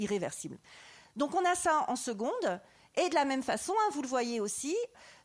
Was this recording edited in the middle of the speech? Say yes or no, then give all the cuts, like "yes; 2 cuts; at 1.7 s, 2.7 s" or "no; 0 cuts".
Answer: no; 0 cuts